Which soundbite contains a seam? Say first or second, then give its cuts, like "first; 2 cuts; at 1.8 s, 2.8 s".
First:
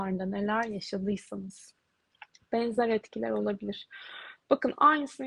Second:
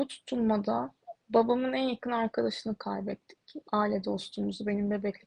second; 1 cut; at 1.2 s